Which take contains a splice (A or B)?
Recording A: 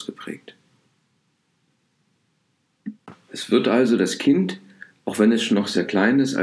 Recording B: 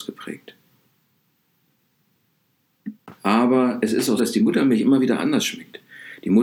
B